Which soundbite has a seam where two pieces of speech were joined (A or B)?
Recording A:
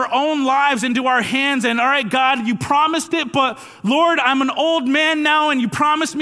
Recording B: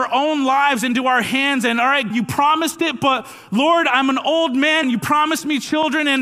B